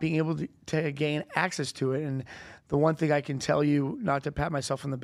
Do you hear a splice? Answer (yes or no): no